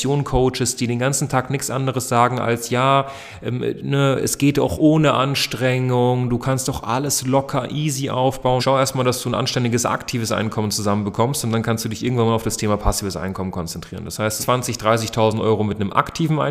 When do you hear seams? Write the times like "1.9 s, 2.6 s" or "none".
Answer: 8.6 s, 14.4 s

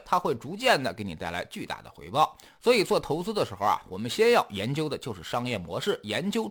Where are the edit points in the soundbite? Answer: none

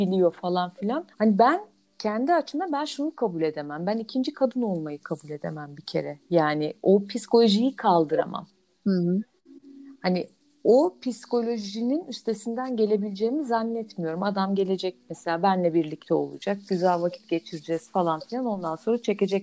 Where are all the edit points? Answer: 1.1 s

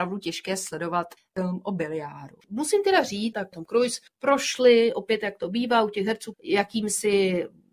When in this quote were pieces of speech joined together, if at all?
3.3 s, 6.3 s

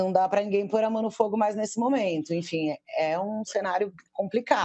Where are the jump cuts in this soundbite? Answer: none

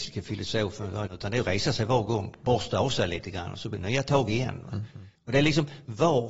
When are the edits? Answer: 1.1 s, 5.2 s

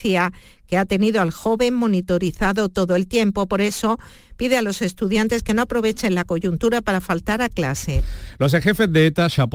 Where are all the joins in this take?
none

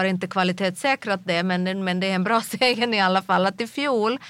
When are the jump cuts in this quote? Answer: none

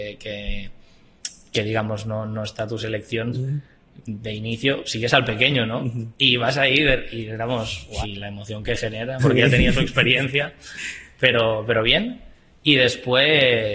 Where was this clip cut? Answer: 3.3 s, 8.0 s, 9.2 s

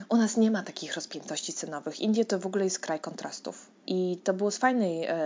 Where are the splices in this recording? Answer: 3.8 s

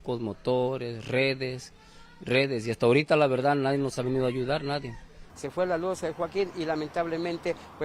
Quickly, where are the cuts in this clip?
5.3 s

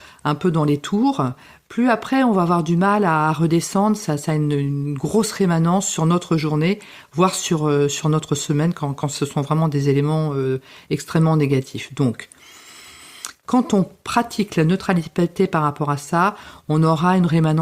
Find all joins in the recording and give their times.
none

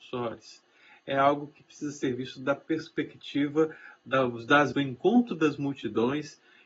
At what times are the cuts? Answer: 4.7 s

